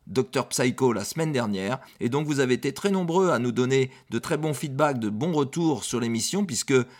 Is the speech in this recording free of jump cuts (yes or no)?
no